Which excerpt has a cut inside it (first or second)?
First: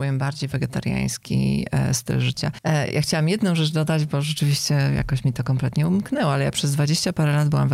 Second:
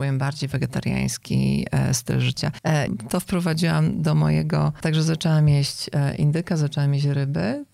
second